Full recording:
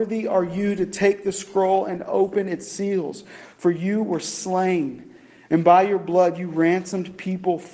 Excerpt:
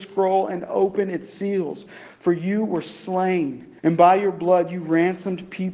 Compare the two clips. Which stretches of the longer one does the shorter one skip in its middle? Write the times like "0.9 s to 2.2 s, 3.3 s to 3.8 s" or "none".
5.2 s to 5.5 s